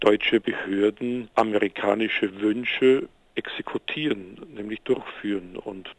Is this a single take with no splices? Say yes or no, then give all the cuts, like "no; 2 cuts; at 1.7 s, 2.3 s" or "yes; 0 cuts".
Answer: yes; 0 cuts